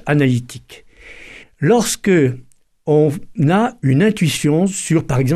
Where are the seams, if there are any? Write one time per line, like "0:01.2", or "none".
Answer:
0:01.4